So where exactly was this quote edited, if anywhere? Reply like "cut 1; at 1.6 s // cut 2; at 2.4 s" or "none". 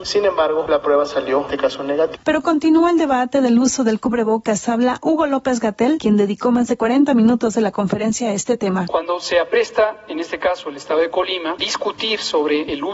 none